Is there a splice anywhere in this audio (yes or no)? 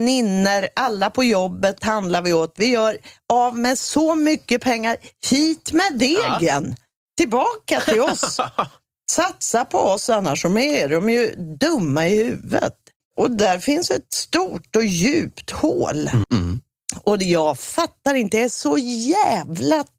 yes